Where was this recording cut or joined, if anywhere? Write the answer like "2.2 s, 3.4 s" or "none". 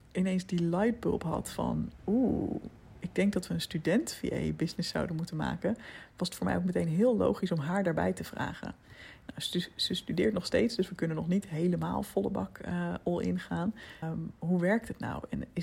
14.0 s